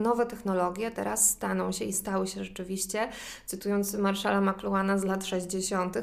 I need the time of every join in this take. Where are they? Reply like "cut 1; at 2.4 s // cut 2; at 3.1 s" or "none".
none